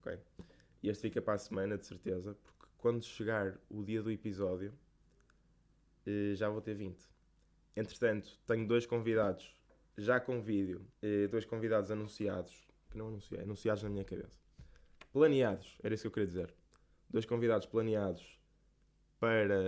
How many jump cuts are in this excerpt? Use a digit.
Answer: 1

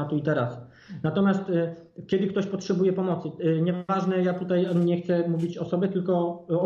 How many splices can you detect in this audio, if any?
1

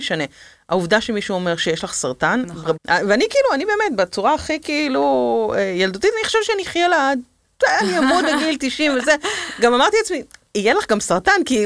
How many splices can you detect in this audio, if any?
1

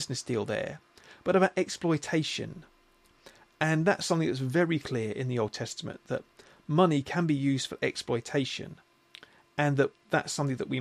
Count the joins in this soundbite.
0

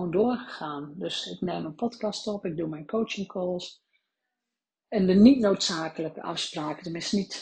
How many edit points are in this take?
0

